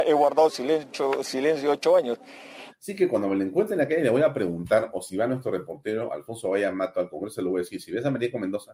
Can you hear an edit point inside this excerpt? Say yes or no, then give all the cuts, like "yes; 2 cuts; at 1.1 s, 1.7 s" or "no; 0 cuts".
yes; 1 cut; at 2.7 s